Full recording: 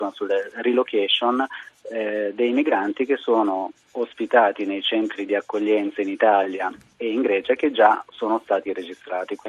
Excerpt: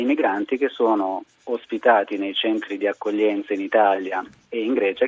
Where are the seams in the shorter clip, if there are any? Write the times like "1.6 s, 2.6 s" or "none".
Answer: none

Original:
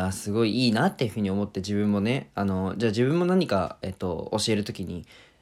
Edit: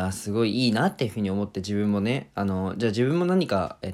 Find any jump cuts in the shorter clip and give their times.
none

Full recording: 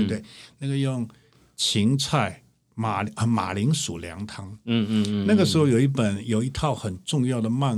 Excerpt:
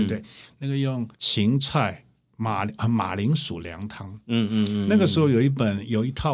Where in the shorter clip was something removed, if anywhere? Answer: 1.1 s

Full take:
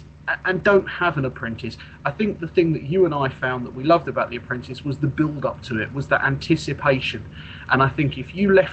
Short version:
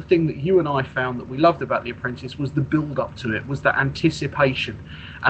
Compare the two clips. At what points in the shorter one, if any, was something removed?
none

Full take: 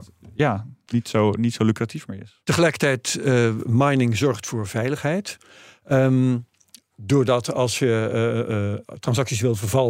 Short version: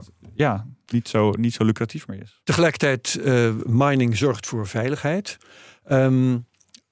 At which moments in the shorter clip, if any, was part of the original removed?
none

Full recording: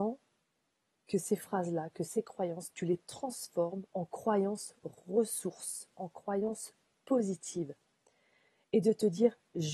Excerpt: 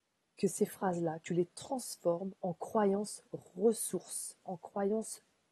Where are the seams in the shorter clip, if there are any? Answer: 1.2 s

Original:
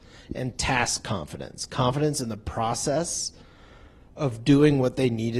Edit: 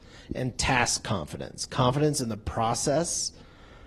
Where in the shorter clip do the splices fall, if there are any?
none

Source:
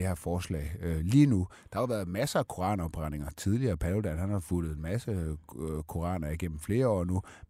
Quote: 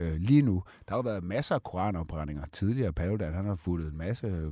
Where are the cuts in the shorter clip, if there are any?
none

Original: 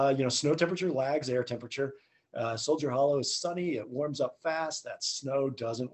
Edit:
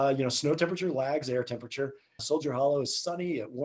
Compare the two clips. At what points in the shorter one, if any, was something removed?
2.2 s

